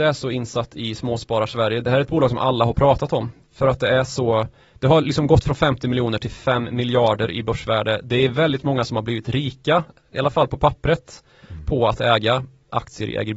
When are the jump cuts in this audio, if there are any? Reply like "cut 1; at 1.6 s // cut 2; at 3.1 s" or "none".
none